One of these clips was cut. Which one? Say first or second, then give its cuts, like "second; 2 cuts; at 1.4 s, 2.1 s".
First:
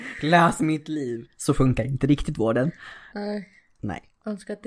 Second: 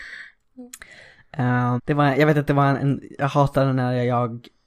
second; 1 cut; at 1.8 s